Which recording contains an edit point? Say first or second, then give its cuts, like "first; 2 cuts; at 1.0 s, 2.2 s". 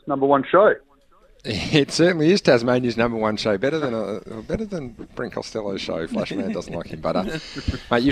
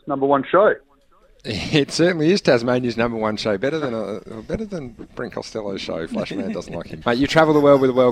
second; 1 cut; at 7.0 s